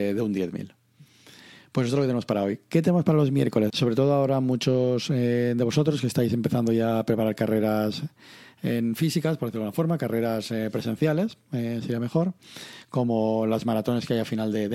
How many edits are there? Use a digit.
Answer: 1